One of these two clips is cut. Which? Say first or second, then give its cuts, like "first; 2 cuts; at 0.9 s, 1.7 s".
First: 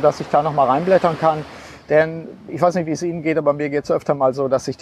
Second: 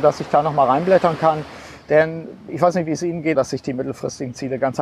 second; 1 cut; at 3.3 s